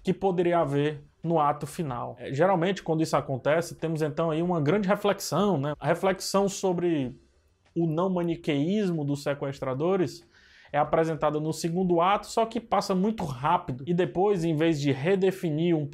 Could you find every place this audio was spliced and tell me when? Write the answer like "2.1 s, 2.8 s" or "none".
5.7 s